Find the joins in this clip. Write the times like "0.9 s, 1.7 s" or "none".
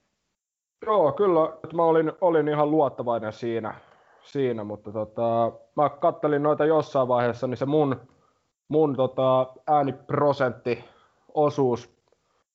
1.6 s